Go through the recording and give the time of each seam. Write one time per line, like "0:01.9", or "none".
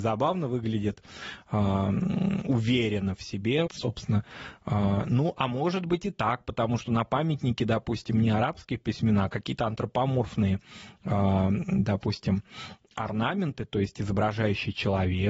0:03.7